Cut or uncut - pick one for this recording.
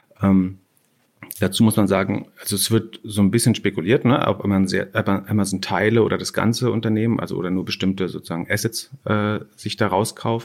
uncut